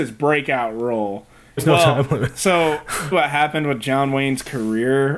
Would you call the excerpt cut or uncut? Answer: cut